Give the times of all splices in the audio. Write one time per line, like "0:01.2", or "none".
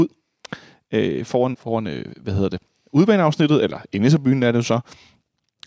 0:01.5

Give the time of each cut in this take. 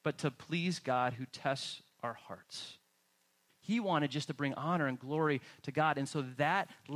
0:03.5

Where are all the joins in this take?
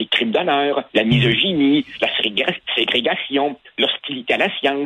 0:00.9

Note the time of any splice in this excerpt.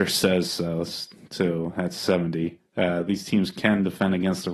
none

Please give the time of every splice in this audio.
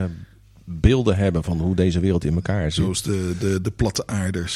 none

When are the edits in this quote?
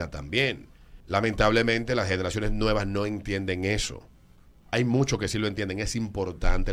0:01.0

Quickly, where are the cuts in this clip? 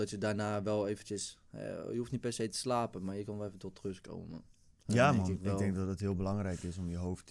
none

